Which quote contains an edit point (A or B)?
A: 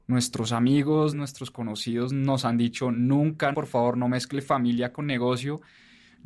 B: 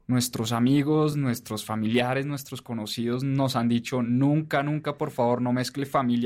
A